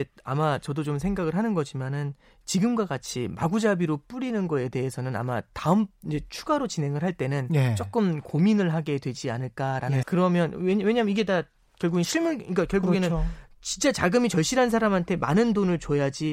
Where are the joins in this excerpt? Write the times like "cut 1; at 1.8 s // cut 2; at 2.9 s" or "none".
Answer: cut 1; at 10.0 s